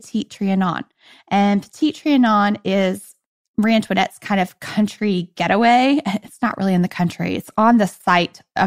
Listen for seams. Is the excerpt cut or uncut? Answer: uncut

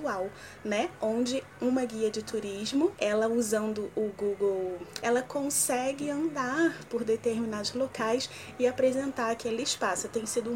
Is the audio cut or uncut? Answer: cut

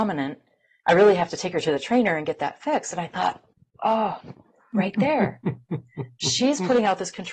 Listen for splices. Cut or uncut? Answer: uncut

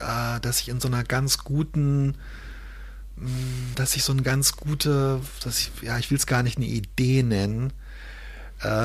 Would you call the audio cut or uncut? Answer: uncut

